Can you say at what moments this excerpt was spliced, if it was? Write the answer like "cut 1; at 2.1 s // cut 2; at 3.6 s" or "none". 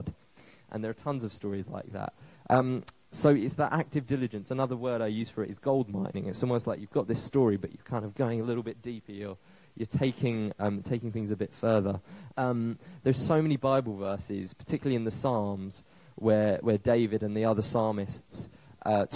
cut 1; at 12.3 s

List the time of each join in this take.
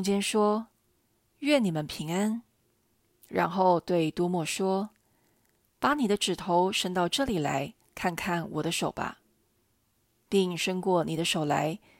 none

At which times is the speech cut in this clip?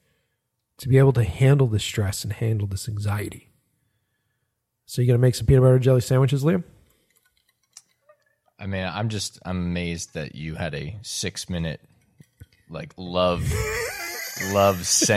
none

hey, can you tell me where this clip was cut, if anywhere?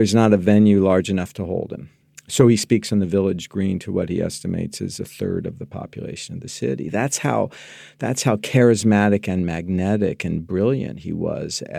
none

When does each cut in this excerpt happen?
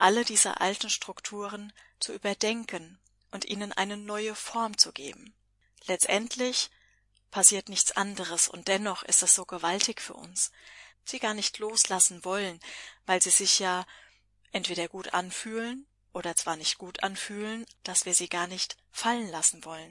cut 1; at 10.9 s // cut 2; at 17.7 s

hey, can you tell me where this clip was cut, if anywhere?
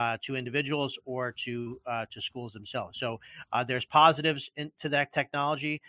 none

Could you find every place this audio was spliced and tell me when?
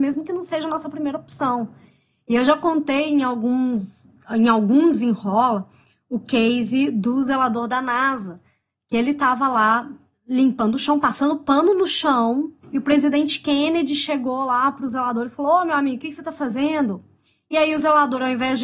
cut 1; at 12.6 s

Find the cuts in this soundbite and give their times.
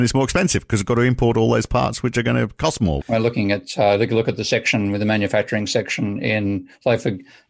cut 1; at 3.0 s

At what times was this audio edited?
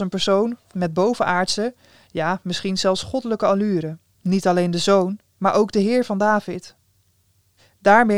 cut 1; at 4.1 s

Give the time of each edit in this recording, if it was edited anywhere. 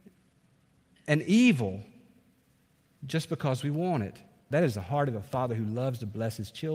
cut 1; at 4.5 s

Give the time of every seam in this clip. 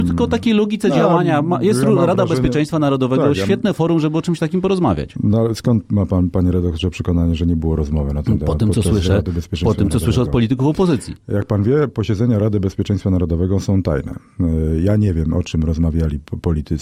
none

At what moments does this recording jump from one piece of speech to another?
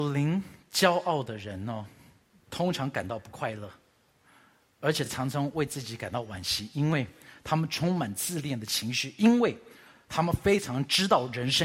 none

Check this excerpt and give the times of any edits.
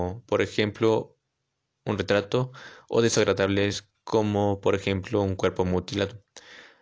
none

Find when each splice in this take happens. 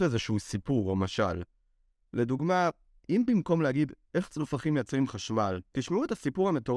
cut 1; at 5.7 s

